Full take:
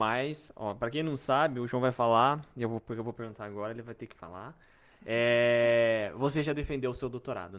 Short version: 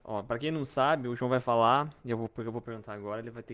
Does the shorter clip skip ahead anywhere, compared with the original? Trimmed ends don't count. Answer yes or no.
no